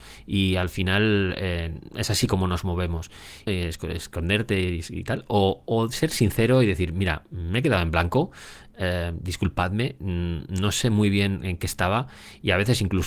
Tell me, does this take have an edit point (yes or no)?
yes